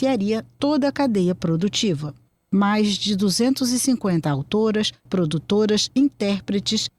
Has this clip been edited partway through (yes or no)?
yes